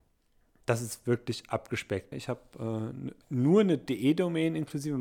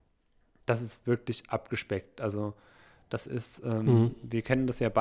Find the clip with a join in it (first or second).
first